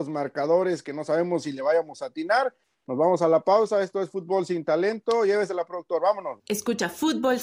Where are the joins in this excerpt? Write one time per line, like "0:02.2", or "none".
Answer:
0:06.4